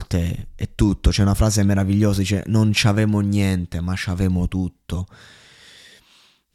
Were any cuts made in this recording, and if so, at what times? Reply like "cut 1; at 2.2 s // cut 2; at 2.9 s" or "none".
none